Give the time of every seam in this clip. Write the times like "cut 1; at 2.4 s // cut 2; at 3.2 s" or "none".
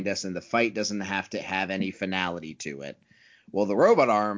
none